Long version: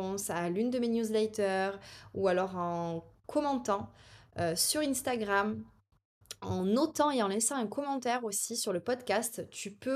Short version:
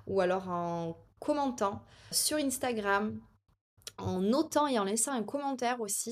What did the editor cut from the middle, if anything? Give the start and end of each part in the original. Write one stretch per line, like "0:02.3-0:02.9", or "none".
0:04.2-0:04.5